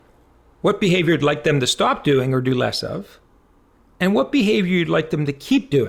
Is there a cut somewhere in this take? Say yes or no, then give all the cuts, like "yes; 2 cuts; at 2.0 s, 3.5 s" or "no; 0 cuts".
no; 0 cuts